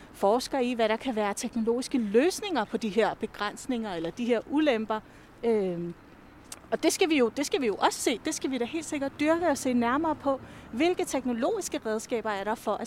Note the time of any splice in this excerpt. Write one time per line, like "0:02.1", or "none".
none